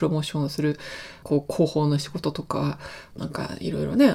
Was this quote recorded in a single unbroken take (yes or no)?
no